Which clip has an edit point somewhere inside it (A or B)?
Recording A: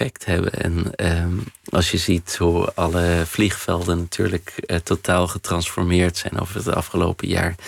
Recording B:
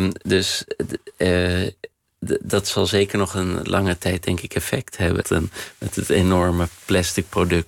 B